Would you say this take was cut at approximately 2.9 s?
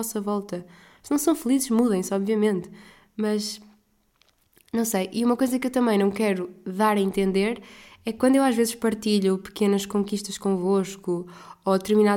no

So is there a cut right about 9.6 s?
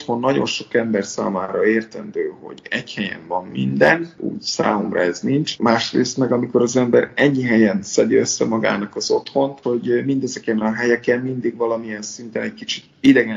yes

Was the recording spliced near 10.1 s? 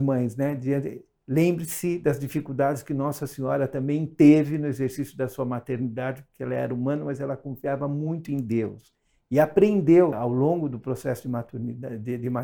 yes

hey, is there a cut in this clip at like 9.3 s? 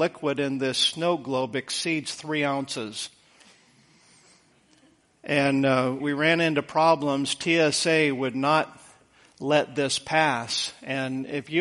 no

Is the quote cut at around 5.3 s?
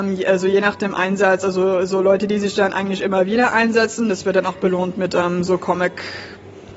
no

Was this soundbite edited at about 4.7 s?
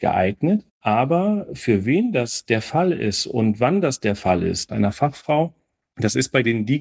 yes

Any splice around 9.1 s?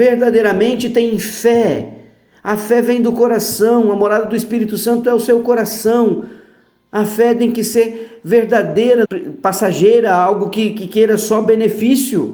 yes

